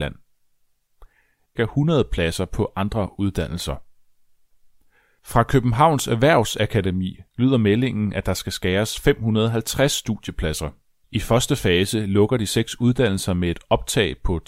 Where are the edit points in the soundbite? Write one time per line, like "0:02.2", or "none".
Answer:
0:01.6
0:11.0